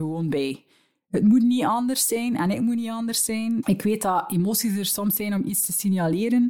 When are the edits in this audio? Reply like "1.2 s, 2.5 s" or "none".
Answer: 3.6 s